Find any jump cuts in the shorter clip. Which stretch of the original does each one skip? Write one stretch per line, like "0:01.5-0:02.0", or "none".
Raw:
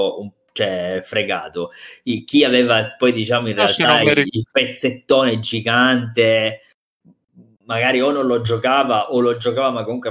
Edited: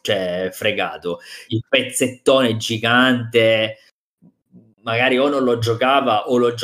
0:02.0-0:04.3